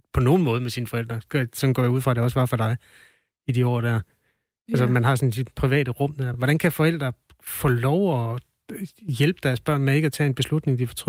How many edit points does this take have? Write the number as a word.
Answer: zero